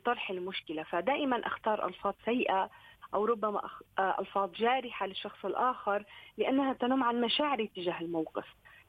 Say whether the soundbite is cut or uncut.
uncut